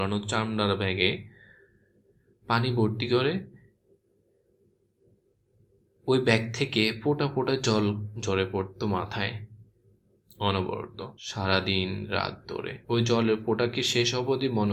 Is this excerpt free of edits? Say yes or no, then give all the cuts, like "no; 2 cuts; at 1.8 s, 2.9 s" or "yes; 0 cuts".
no; 2 cuts; at 11.2 s, 12.8 s